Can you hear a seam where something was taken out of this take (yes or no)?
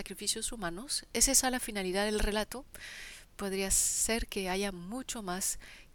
no